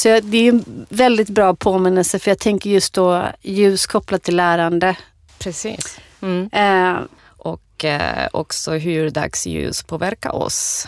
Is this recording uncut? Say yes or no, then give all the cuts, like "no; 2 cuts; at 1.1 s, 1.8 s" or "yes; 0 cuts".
no; 2 cuts; at 5.3 s, 7.2 s